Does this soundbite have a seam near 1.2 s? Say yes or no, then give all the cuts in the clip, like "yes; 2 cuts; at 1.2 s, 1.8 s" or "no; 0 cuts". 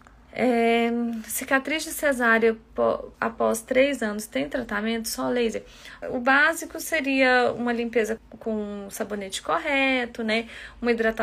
no; 3 cuts; at 3.1 s, 6.0 s, 8.2 s